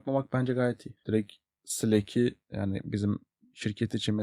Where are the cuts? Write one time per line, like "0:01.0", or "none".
0:01.0
0:02.4

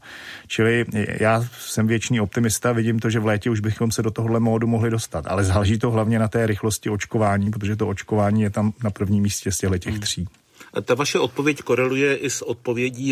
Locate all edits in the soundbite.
none

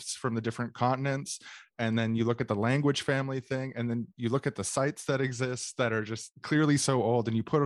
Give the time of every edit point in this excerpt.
none

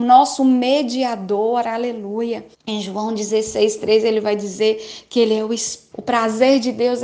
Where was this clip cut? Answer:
0:02.5
0:05.9

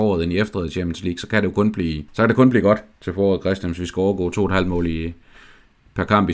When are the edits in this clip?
0:02.1

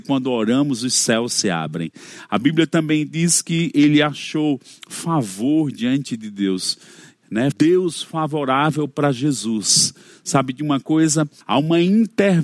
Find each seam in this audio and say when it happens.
0:07.5
0:11.4

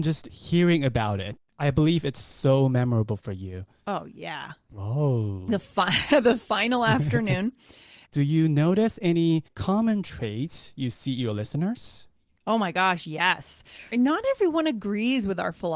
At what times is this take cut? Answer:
0:04.7
0:08.1
0:13.9

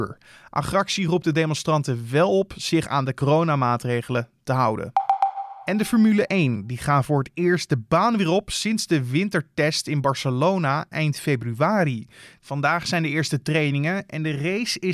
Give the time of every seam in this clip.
none

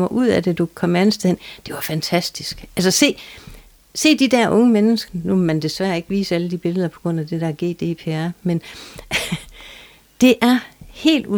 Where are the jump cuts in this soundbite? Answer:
0:05.1

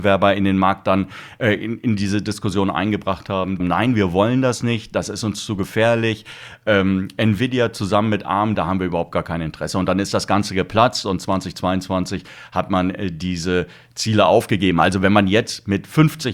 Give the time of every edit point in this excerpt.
0:03.6
0:08.6

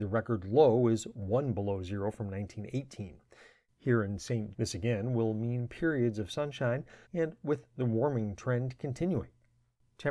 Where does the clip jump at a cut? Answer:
0:04.5
0:07.0

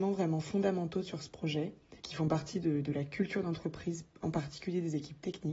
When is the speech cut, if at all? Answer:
0:02.0

